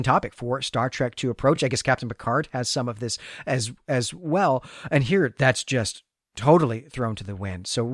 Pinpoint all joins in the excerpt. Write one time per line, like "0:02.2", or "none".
none

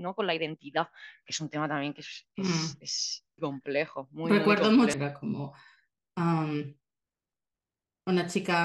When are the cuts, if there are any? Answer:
0:03.4
0:04.9

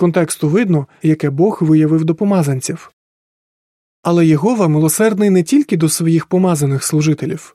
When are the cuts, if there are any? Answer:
0:01.0

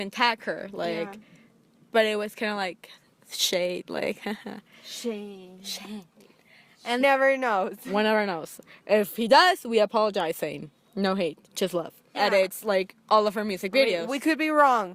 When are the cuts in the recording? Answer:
0:07.0
0:12.1

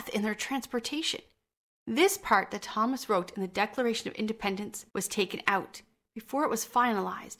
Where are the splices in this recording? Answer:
0:01.7
0:04.9

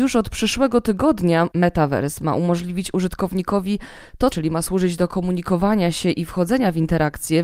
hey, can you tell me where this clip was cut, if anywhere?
0:01.5
0:04.3

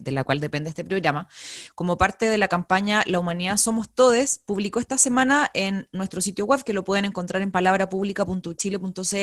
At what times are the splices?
none

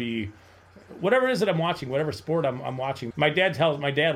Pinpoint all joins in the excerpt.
0:03.1

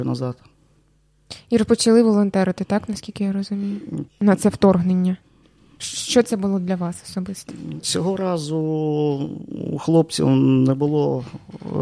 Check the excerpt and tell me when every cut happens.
0:04.1
0:07.8

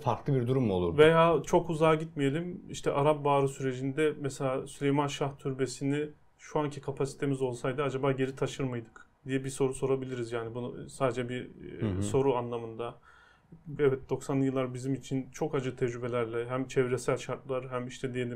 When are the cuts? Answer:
0:09.2
0:13.8

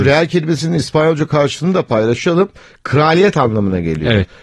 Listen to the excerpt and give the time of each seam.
none

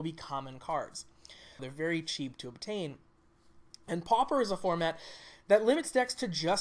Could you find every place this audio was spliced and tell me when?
0:01.6

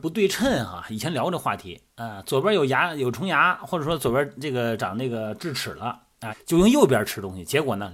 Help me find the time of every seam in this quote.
0:04.8
0:06.3

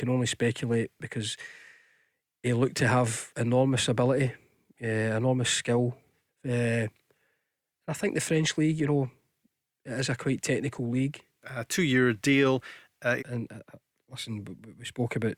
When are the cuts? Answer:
0:06.3
0:11.4
0:13.2

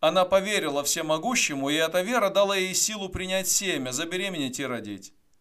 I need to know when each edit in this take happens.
none

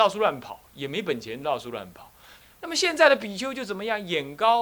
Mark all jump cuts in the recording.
0:02.4

